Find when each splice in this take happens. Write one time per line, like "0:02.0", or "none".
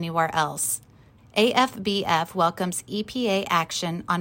0:01.2